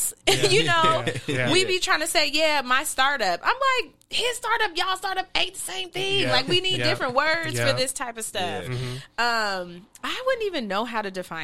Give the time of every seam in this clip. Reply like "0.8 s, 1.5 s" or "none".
none